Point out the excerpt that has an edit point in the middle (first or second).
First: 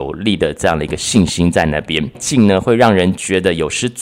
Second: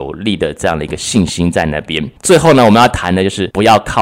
first